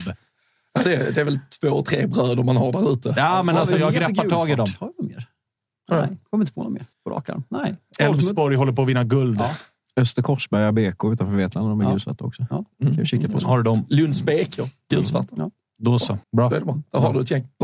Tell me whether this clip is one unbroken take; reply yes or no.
no